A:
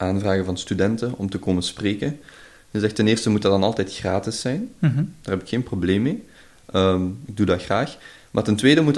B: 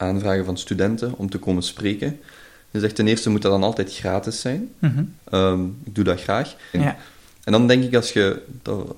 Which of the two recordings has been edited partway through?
B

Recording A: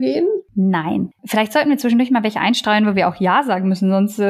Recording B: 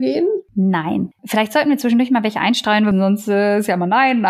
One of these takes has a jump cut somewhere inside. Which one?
B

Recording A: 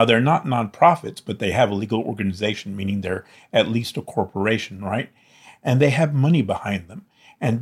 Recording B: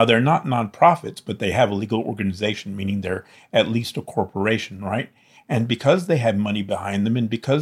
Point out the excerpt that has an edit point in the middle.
B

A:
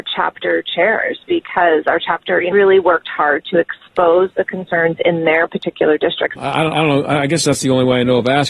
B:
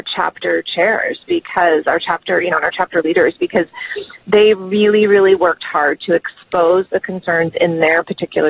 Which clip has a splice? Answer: A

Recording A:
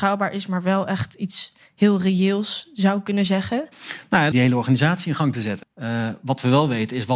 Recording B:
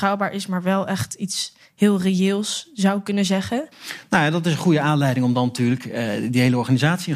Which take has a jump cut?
A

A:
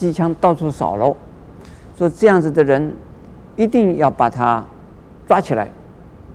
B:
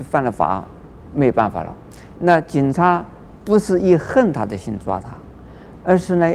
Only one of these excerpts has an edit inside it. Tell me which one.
B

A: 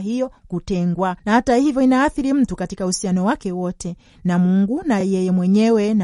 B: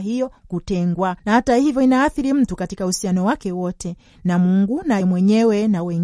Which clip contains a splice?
B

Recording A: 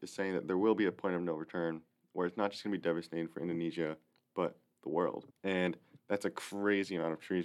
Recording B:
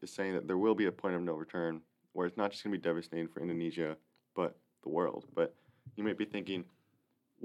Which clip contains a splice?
A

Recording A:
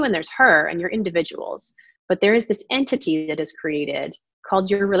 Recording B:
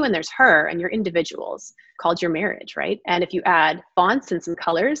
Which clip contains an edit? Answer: B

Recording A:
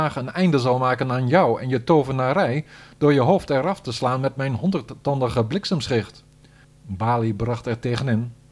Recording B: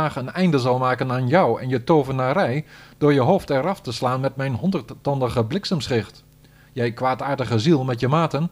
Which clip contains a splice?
A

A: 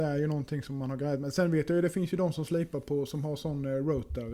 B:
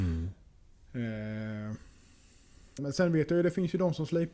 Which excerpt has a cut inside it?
B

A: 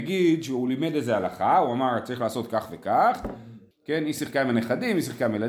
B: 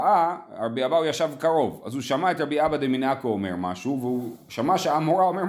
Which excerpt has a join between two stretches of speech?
A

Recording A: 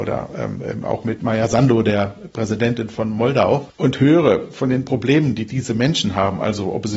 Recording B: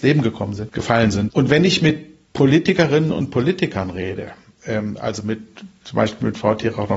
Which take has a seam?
B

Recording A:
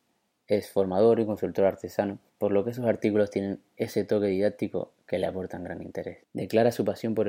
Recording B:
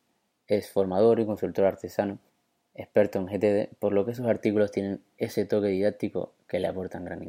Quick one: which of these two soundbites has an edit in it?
A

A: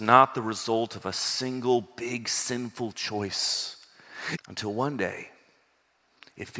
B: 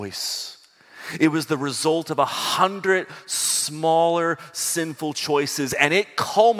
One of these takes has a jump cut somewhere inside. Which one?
A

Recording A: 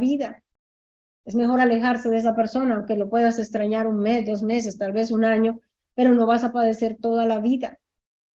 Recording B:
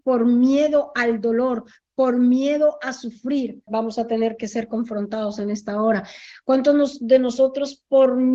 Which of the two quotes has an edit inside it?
B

